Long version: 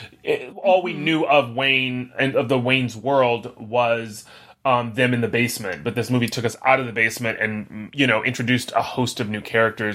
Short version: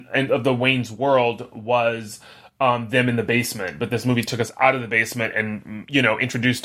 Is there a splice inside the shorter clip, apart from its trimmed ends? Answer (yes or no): no